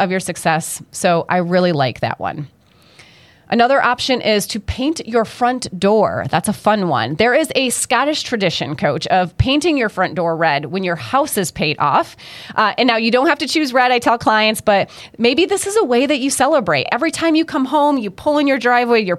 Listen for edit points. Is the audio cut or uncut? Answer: uncut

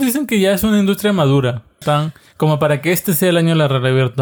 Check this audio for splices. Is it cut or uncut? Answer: cut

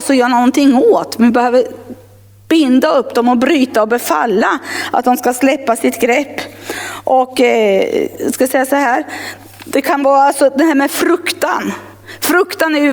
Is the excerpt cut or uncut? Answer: uncut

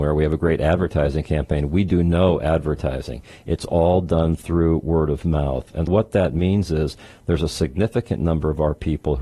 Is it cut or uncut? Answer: cut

